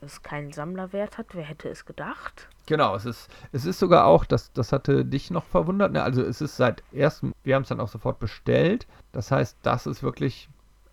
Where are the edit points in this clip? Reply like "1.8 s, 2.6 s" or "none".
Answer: 7.3 s, 9.0 s